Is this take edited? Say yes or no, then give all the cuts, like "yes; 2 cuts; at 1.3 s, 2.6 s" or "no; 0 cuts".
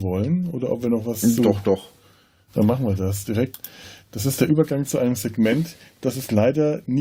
no; 0 cuts